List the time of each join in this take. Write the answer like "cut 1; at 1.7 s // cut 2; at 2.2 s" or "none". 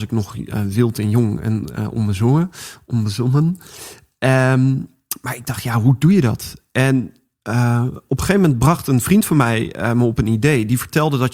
none